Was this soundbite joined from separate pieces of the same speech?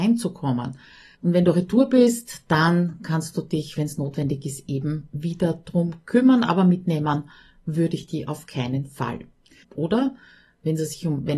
yes; 2 cuts; at 1.1 s, 9.6 s

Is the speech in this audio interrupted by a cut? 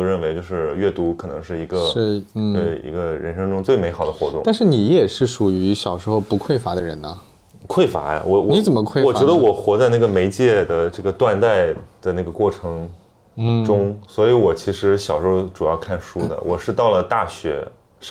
no; 0 cuts

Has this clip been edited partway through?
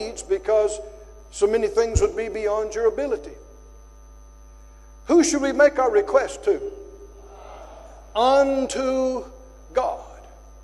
no; 0 cuts

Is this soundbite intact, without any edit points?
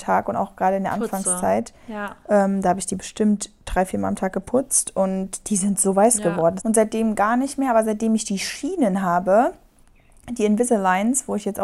no; 1 cut; at 6.6 s

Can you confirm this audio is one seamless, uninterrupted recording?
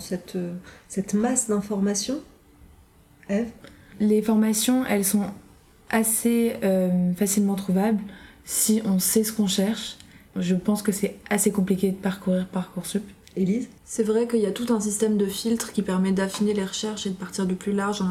no; 2 cuts; at 10.3 s, 13.8 s

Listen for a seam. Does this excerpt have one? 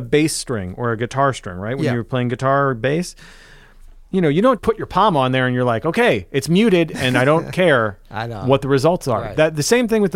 yes; 1 cut; at 4.6 s

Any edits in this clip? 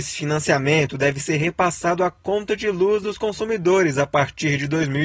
no; 0 cuts

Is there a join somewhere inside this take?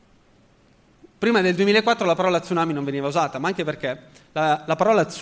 no; 0 cuts

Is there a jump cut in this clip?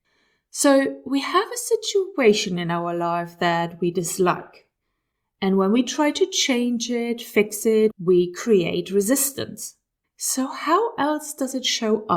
yes; 2 cuts; at 7.9 s, 10.0 s

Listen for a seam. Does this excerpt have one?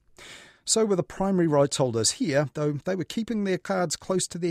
no; 0 cuts

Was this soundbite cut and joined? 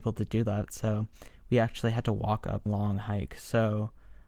yes; 1 cut; at 2.7 s

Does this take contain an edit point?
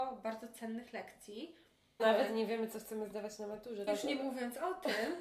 yes; 2 cuts; at 2.0 s, 3.9 s

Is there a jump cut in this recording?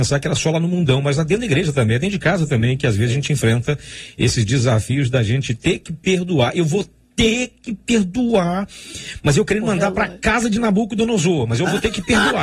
no; 0 cuts

